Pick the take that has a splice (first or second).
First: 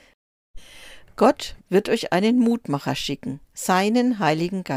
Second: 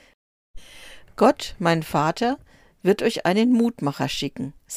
first